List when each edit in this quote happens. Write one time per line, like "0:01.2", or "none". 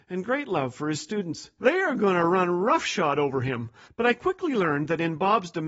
0:01.6
0:03.9